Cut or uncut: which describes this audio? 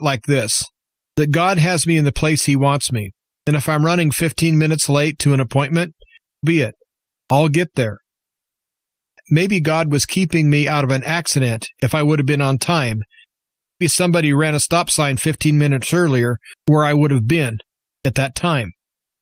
cut